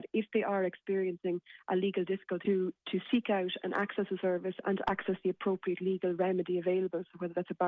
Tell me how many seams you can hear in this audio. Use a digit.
1